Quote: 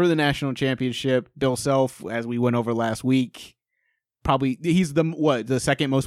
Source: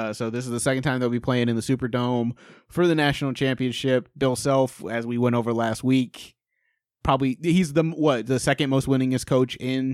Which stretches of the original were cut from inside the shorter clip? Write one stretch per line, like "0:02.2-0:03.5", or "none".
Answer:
none